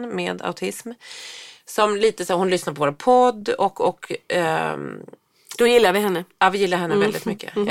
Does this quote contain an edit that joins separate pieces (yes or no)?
no